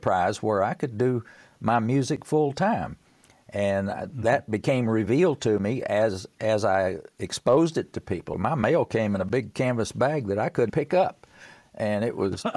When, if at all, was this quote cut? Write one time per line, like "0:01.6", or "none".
0:08.3
0:10.7